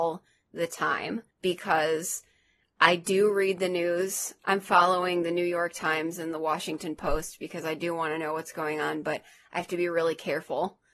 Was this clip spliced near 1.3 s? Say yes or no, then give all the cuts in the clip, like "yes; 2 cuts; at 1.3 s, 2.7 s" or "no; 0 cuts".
yes; 1 cut; at 1.3 s